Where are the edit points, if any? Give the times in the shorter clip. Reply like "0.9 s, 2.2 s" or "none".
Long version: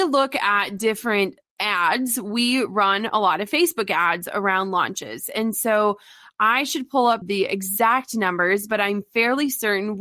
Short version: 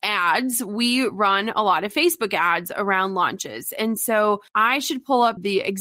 4.5 s